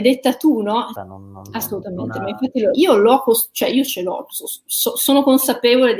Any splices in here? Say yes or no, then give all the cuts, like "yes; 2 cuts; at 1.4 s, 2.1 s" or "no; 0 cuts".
yes; 2 cuts; at 1.0 s, 2.7 s